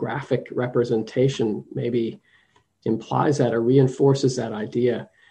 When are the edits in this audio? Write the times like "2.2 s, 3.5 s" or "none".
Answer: none